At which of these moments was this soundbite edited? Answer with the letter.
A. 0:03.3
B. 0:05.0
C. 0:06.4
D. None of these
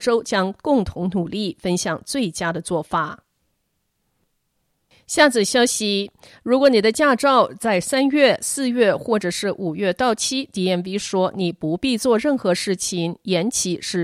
D